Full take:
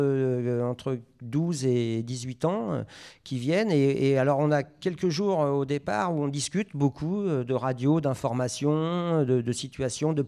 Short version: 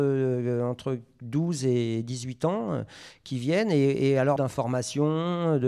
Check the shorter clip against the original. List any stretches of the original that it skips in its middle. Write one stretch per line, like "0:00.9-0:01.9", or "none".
0:04.4-0:08.0